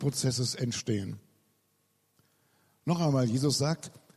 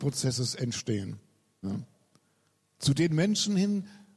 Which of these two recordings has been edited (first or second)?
second